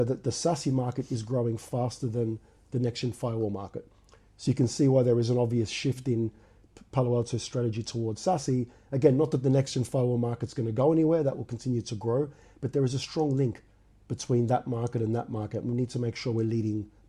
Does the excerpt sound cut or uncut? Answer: uncut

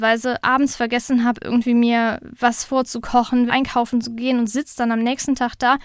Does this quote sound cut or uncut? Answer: cut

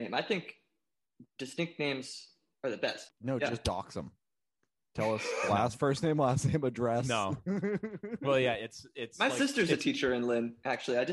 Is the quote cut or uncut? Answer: cut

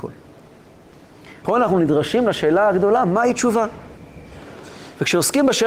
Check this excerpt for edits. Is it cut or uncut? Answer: cut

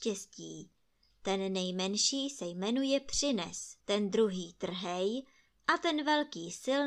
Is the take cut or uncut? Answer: cut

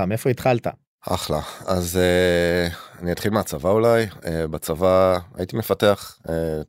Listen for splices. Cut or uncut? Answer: uncut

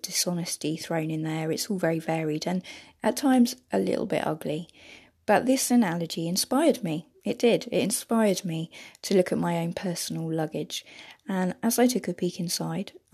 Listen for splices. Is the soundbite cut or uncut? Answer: uncut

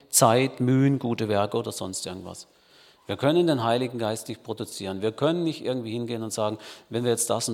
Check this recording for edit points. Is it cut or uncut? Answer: uncut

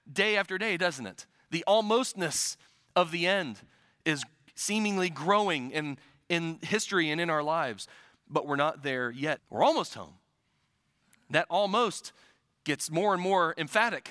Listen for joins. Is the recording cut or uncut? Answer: cut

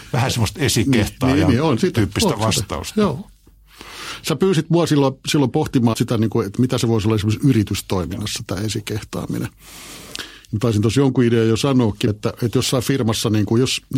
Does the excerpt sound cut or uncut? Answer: cut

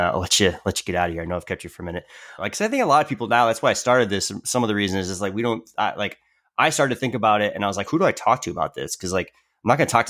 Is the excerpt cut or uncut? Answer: cut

